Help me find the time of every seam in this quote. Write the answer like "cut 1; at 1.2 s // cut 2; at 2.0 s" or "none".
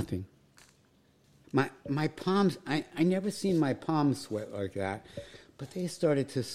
cut 1; at 1.4 s

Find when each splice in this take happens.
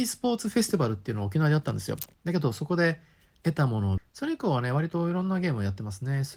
cut 1; at 2.1 s // cut 2; at 4.0 s

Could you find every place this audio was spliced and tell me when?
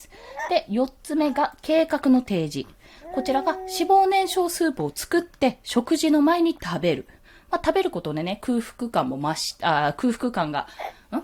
none

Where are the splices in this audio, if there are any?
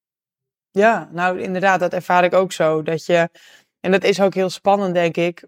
none

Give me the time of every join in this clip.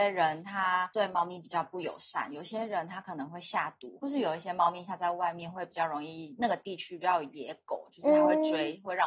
cut 1; at 4.0 s

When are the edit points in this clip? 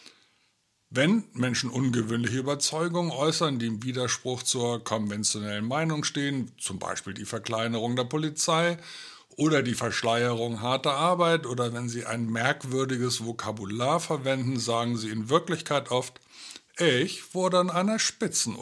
none

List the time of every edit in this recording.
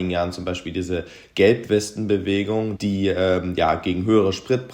cut 1; at 2.8 s

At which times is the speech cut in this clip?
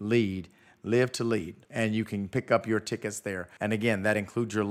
cut 1; at 1.6 s // cut 2; at 3.6 s

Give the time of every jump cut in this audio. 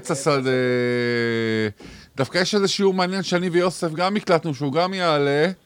none

